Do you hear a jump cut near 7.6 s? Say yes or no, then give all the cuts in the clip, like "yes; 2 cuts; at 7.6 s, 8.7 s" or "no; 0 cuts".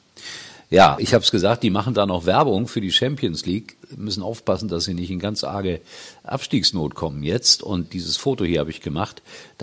no; 1 cut; at 1.0 s